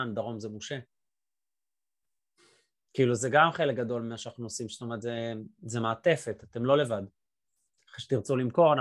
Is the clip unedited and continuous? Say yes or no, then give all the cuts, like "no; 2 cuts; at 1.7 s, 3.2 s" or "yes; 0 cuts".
yes; 0 cuts